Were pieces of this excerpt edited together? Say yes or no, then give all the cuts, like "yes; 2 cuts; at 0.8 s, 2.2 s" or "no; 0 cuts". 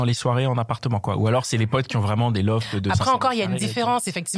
no; 0 cuts